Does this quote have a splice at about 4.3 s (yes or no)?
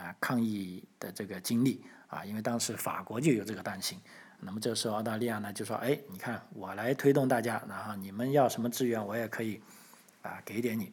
no